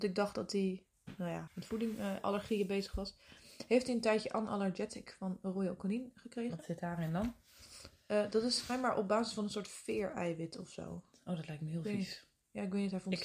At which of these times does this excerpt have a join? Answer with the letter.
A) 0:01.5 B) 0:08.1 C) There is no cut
A